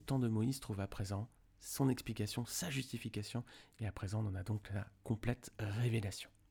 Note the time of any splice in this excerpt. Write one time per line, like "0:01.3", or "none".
none